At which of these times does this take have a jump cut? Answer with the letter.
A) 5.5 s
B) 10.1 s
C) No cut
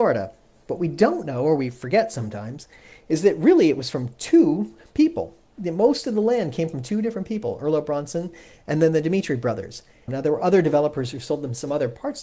B